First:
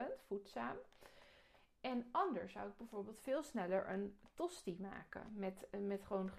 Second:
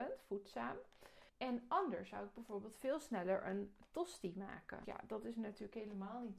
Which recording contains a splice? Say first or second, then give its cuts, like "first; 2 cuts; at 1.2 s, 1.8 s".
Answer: second; 2 cuts; at 1.3 s, 4.8 s